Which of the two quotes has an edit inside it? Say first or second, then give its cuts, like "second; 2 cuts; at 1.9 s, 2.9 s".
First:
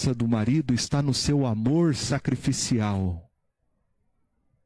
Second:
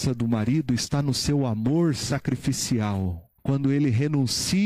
second; 1 cut; at 3.4 s